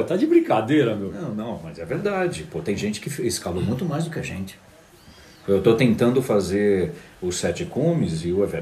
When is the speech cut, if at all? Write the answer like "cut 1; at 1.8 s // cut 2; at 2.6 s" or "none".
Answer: none